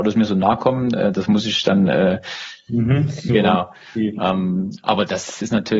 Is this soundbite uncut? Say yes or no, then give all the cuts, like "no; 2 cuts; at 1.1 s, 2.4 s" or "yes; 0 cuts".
no; 1 cut; at 3.3 s